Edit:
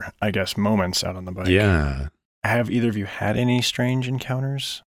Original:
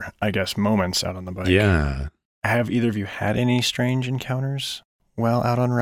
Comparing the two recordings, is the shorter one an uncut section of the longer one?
yes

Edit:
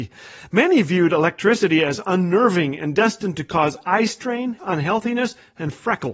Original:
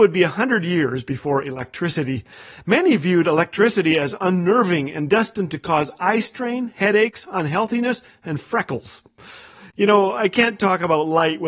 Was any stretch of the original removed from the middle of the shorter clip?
yes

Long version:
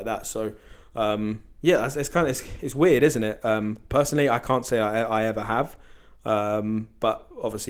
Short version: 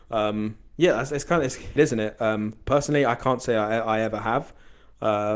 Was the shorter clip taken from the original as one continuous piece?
no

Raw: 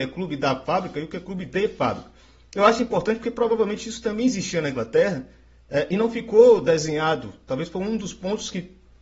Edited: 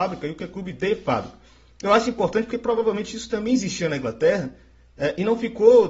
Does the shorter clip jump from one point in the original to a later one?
no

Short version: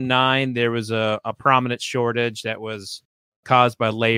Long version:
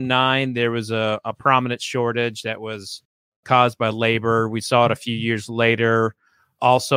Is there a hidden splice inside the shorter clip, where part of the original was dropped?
no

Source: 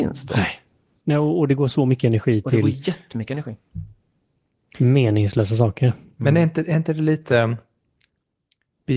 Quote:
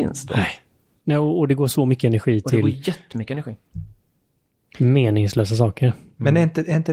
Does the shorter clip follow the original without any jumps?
yes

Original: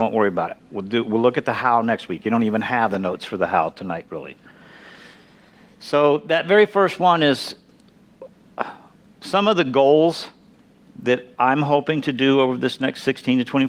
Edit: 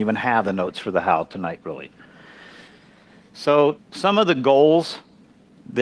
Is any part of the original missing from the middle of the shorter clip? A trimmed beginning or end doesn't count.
yes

